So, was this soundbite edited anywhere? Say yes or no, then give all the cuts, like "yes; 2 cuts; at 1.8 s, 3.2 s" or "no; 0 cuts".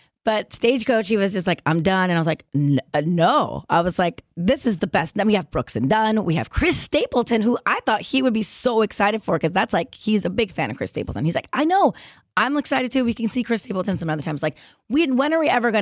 no; 0 cuts